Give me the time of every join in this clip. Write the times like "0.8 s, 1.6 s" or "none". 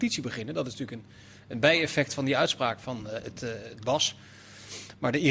none

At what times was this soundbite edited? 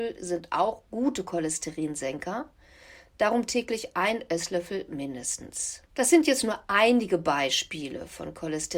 5.9 s

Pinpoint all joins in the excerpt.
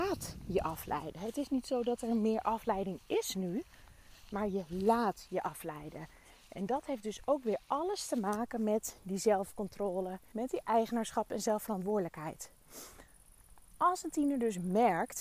10.3 s

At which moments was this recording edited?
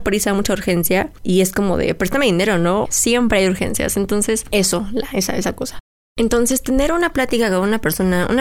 2.8 s

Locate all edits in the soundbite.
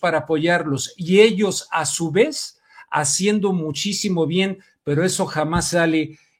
none

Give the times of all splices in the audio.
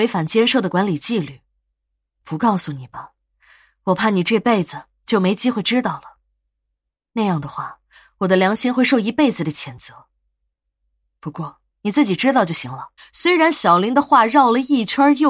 11.7 s, 13.0 s

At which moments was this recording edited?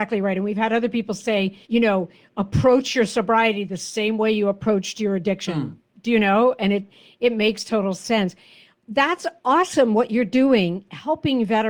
1.6 s

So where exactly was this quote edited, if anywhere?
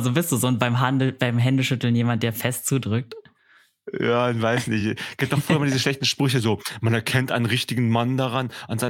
none

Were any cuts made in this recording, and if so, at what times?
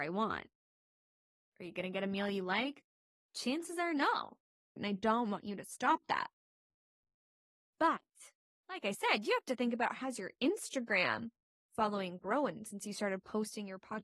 4.8 s

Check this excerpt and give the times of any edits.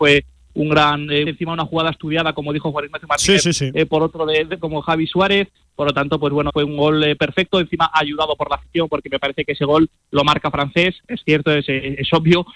1.3 s, 4.6 s, 6.5 s

